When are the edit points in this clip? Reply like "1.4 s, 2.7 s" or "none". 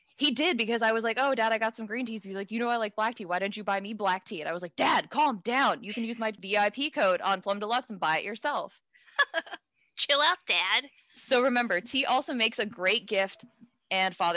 none